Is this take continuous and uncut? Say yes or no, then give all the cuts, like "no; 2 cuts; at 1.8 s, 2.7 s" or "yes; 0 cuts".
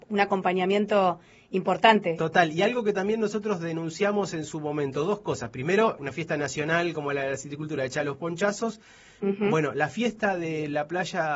no; 2 cuts; at 6.0 s, 9.2 s